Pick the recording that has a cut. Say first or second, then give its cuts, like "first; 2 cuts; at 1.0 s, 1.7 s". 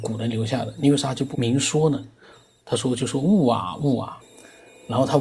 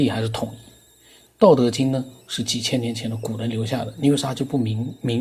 first; 2 cuts; at 1.3 s, 4.2 s